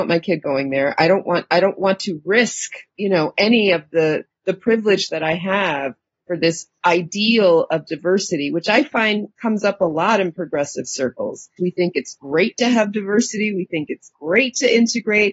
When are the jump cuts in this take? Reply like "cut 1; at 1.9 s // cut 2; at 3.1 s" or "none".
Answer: cut 1; at 11.6 s